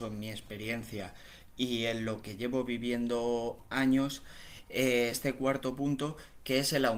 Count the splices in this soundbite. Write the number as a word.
one